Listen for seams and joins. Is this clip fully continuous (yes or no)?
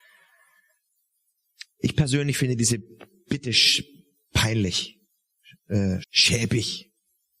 no